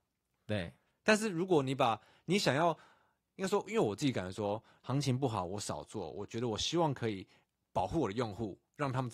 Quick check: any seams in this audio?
yes; 1 cut; at 4.8 s

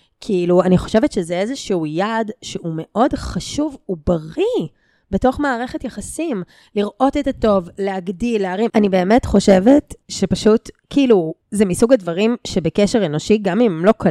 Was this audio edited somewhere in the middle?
yes; 2 cuts; at 8.7 s, 11.4 s

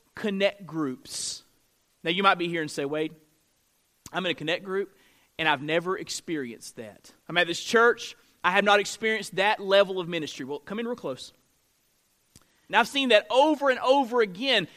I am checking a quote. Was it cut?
yes; 2 cuts; at 7.2 s, 12.7 s

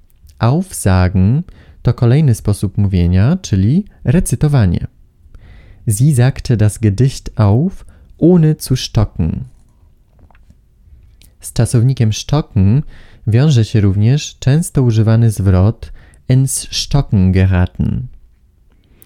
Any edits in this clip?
no; 0 cuts

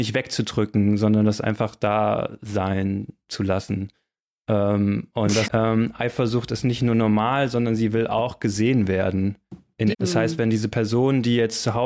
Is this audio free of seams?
no; 2 cuts; at 5.4 s, 9.9 s

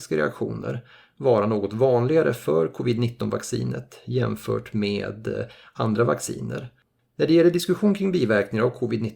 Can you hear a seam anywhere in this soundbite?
yes; 1 cut; at 7.1 s

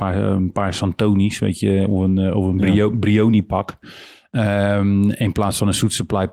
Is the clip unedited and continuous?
yes; 0 cuts

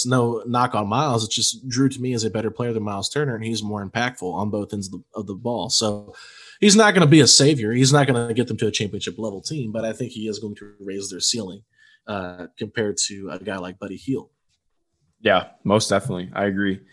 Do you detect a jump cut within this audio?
no; 0 cuts

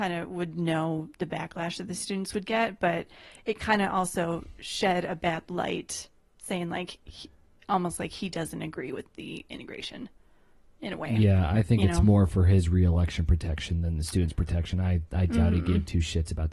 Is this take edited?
no; 0 cuts

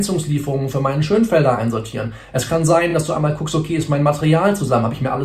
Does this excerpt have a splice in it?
no; 0 cuts

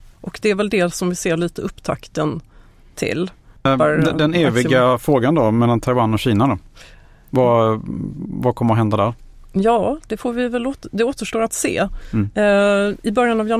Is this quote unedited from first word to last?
no; 1 cut; at 3.6 s

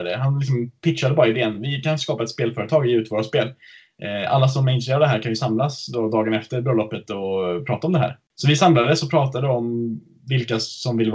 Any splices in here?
no; 0 cuts

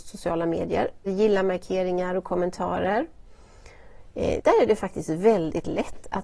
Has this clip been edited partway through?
yes; 2 cuts; at 1.1 s, 4.4 s

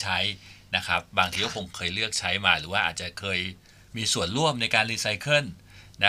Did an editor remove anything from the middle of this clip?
no; 0 cuts

